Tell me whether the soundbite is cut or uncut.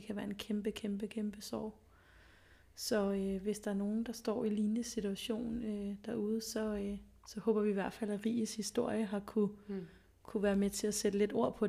uncut